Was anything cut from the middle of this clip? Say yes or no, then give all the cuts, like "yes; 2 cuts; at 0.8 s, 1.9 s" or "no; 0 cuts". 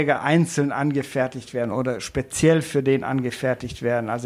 no; 0 cuts